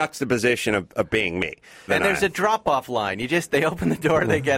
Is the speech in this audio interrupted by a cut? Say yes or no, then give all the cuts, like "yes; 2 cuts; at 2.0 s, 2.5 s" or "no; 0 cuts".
yes; 1 cut; at 1.9 s